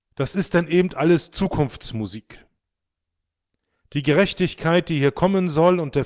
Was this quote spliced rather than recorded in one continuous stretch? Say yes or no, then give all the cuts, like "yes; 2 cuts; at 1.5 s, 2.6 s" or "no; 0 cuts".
no; 0 cuts